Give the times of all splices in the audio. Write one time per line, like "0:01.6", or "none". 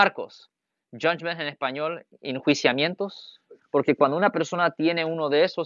0:03.6

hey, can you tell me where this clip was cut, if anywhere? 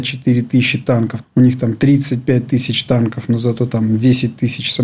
0:01.2

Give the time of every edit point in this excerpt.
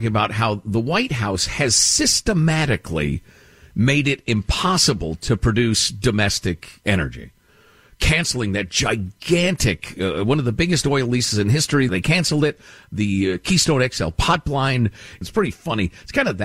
0:11.9
0:15.2

